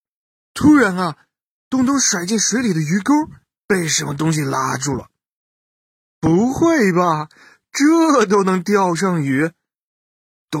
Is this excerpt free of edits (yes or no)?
yes